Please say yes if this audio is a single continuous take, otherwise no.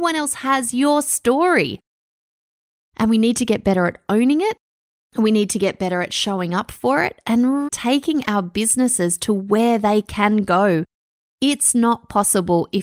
no